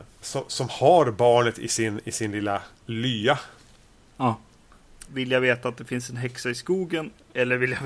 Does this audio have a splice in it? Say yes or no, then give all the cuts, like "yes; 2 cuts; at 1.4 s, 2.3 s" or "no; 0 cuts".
yes; 1 cut; at 5.1 s